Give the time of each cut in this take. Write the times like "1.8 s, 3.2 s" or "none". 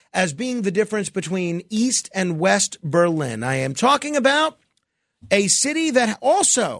none